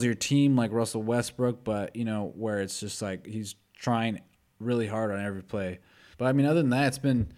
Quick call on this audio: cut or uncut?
cut